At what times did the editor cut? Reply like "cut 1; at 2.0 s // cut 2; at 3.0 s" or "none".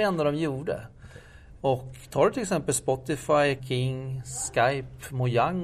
cut 1; at 1.6 s // cut 2; at 3.6 s